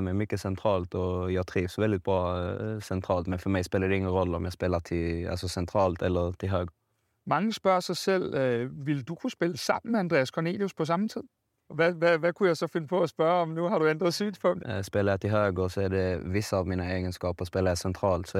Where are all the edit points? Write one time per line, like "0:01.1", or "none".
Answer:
0:11.7
0:14.6